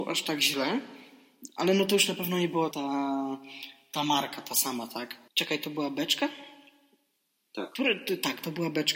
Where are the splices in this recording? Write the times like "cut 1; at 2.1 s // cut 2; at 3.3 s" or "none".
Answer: cut 1; at 2.7 s // cut 2; at 5.3 s